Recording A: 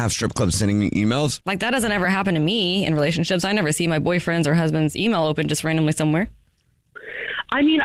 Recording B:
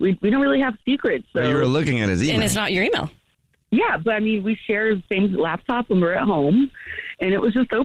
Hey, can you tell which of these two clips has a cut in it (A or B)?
A